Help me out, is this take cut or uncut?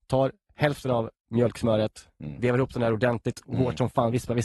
cut